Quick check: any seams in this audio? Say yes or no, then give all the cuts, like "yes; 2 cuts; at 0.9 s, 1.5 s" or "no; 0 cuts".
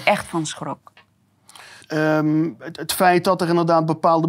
yes; 1 cut; at 1.8 s